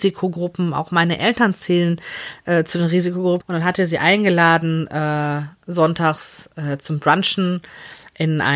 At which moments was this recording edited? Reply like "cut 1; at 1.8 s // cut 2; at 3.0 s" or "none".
cut 1; at 3.4 s